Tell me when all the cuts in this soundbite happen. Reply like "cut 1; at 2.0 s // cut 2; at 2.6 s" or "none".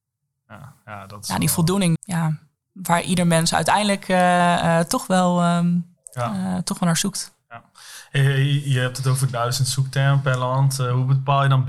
cut 1; at 1.9 s